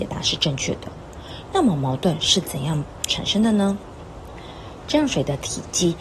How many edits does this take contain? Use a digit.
2